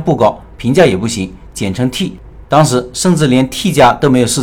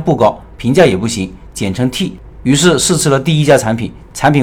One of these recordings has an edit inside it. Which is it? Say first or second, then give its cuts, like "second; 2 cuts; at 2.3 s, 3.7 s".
first; 1 cut; at 2.4 s